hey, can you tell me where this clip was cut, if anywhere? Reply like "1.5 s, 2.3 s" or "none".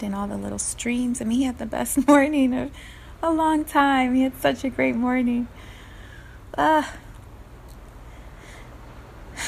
none